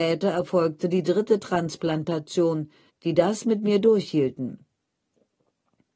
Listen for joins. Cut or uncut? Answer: cut